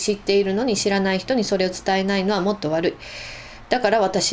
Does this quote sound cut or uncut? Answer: uncut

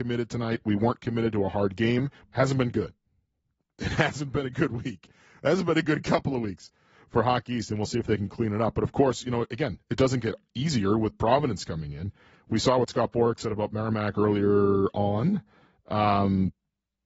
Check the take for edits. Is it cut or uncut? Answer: cut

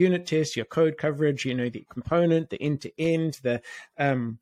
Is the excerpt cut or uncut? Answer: uncut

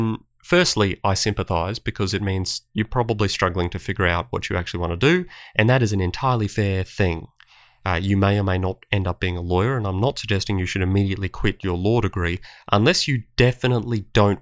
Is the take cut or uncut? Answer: uncut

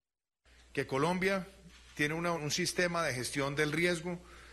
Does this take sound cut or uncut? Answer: cut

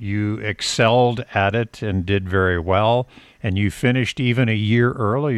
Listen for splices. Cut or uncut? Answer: uncut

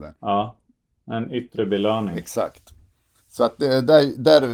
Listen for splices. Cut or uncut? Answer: cut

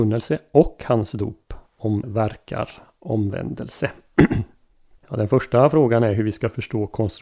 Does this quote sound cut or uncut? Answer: cut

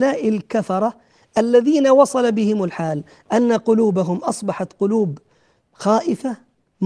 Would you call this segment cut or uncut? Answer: uncut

